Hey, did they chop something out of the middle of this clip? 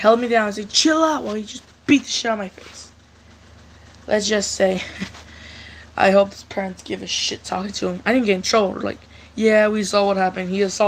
no; 0 cuts

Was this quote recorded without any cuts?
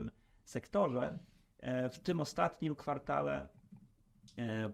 yes; 0 cuts

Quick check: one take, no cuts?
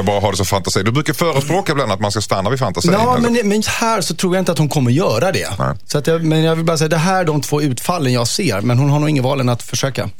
no; 1 cut; at 3.6 s

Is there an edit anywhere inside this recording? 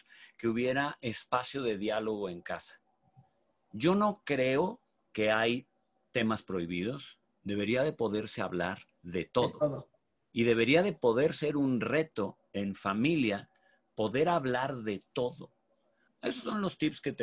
yes; 3 cuts; at 5.0 s, 9.0 s, 16.1 s

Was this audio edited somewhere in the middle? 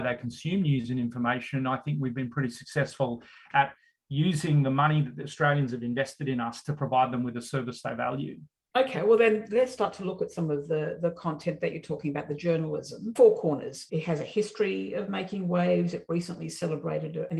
no; 0 cuts

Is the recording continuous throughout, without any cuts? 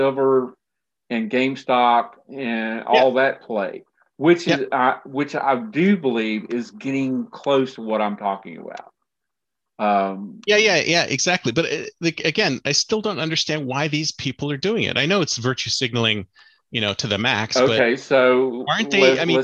yes; 0 cuts

